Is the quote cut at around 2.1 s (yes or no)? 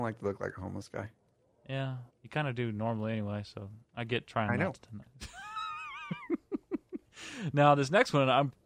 yes